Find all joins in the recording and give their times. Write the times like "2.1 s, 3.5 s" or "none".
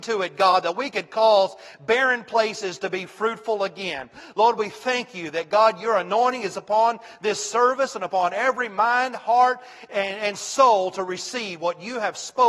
none